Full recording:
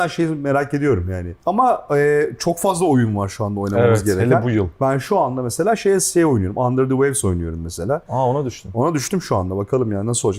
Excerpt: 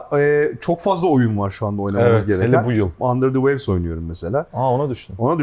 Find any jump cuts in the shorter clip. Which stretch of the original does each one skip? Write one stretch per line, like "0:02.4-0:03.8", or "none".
0:04.8-0:06.5